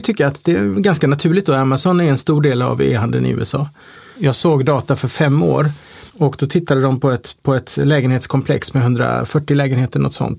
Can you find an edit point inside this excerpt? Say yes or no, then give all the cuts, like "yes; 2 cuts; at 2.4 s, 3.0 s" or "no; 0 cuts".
yes; 2 cuts; at 4.2 s, 6.1 s